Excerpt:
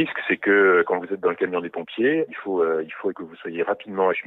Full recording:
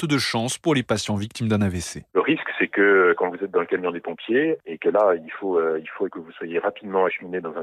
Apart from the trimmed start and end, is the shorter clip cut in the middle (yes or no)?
yes